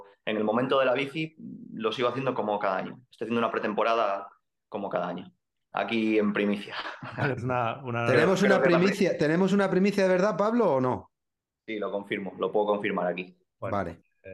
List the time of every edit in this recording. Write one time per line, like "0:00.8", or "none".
0:05.7
0:07.4